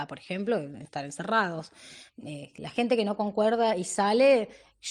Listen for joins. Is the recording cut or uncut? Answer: uncut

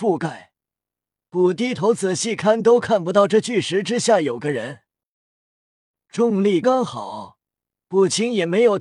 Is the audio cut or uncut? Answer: cut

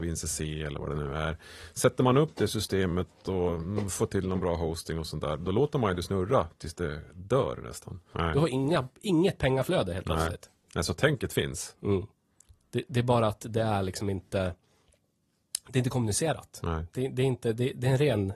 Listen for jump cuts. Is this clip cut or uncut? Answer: cut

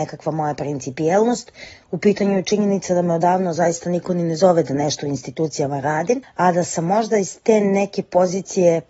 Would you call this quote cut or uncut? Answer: uncut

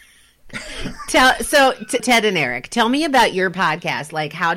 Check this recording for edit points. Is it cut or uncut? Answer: cut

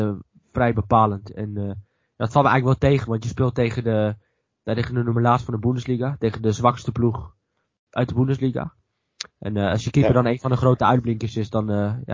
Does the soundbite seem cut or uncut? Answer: uncut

